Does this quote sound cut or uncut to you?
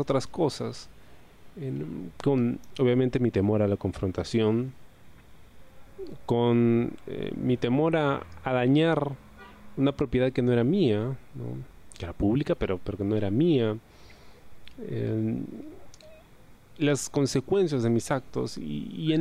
uncut